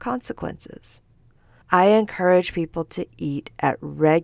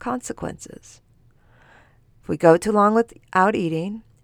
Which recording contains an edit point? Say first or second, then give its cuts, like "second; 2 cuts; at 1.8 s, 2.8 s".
first; 1 cut; at 1.6 s